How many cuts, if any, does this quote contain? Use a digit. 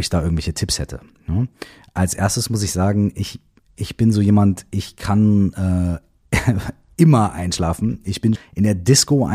1